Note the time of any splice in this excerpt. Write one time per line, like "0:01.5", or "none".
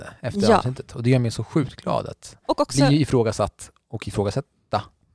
0:02.4